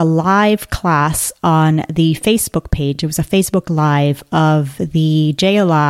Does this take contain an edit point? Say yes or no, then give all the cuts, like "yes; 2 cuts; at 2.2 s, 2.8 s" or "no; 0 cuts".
no; 0 cuts